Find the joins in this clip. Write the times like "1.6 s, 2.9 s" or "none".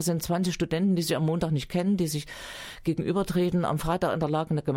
none